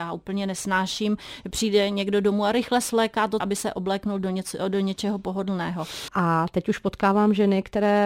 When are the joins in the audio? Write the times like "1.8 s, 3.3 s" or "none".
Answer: 3.4 s, 6.1 s